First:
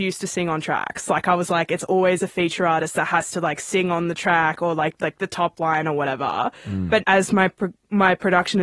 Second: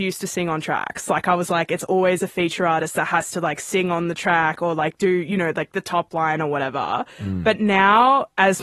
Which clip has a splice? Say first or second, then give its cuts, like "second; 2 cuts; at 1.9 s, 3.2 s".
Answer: first; 2 cuts; at 5.0 s, 7.0 s